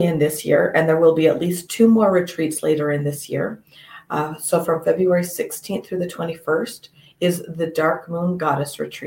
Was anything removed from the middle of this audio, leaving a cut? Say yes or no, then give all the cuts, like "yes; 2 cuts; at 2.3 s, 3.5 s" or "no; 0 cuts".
no; 0 cuts